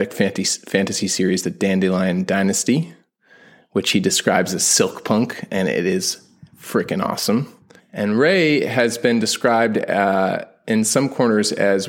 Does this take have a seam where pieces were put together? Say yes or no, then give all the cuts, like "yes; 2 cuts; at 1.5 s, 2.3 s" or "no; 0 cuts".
yes; 1 cut; at 7.8 s